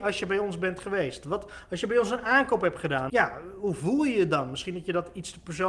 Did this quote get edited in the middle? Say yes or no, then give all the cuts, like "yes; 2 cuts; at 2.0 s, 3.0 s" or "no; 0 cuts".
yes; 1 cut; at 3.1 s